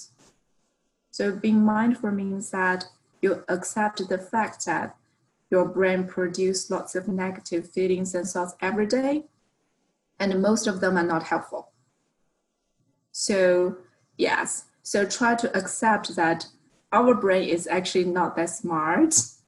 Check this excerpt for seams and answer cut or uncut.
uncut